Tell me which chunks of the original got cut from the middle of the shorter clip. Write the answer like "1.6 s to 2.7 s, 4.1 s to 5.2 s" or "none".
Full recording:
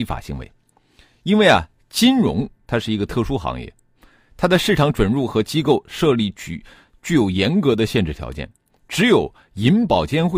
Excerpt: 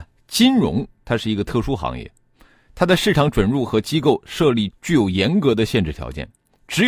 6.3 s to 6.9 s